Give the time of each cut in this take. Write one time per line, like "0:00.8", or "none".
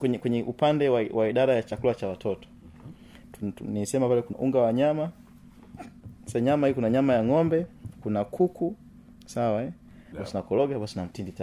0:04.3
0:10.1